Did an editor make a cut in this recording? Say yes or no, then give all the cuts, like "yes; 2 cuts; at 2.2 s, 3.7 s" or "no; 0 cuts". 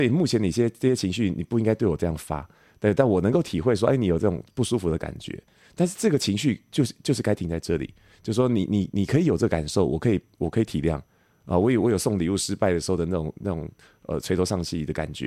no; 0 cuts